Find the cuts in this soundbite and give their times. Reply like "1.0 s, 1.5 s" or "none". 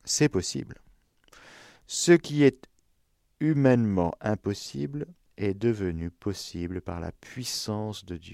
none